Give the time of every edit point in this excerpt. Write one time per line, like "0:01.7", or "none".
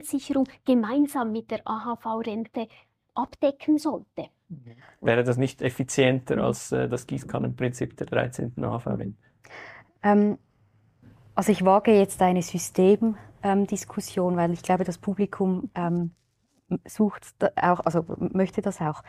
none